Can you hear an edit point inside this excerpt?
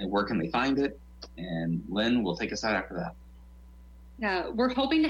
no; 0 cuts

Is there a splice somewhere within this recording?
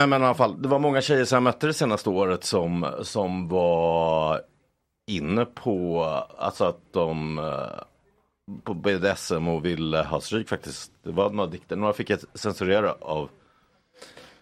no; 0 cuts

